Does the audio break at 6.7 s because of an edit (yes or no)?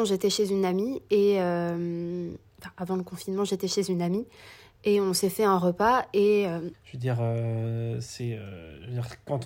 yes